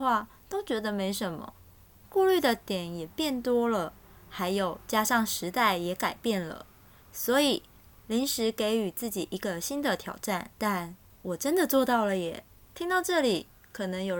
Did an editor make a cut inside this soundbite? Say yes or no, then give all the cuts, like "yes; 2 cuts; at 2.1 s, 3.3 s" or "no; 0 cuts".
yes; 3 cuts; at 2.0 s, 10.5 s, 12.7 s